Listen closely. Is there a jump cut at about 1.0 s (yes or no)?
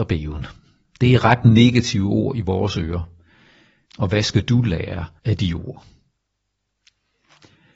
no